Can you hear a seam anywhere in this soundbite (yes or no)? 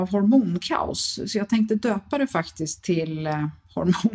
no